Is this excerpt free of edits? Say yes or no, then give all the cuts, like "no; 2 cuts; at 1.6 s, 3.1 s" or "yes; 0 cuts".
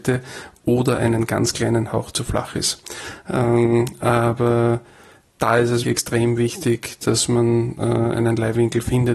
no; 2 cuts; at 5.8 s, 8.1 s